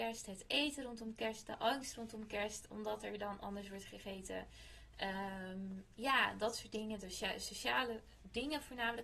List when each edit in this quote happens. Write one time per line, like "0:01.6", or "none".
none

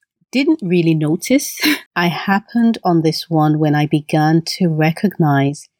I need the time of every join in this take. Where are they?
0:01.9

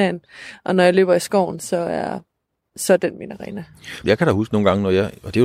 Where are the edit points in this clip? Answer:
0:04.0

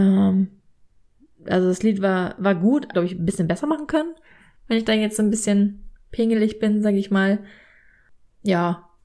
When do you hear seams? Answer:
0:02.9

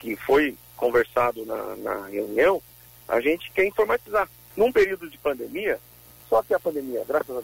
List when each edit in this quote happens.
0:04.5
0:06.2

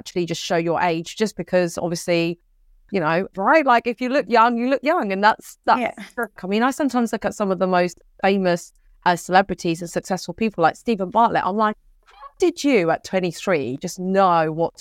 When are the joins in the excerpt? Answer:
0:03.3
0:06.4

